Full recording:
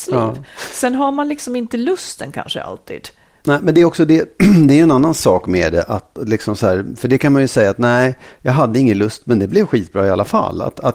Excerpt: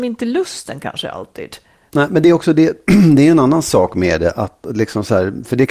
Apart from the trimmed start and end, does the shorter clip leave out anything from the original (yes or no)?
no